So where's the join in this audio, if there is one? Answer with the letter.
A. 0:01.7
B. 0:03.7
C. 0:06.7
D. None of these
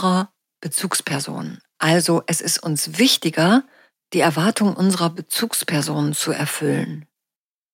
D